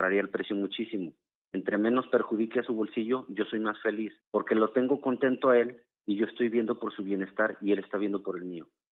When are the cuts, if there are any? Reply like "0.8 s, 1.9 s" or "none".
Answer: 1.5 s, 4.2 s